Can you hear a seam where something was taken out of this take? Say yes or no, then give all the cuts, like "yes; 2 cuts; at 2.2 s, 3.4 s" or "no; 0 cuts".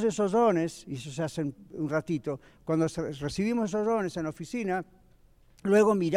no; 0 cuts